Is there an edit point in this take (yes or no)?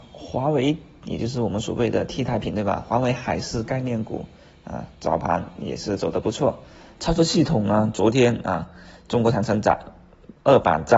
yes